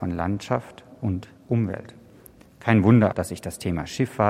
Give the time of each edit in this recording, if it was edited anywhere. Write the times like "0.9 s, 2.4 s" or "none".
3.1 s